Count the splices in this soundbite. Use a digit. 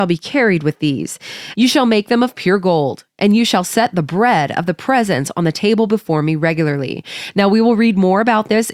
1